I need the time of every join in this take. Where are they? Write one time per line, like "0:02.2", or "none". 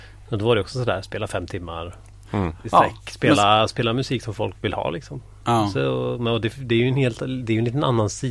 none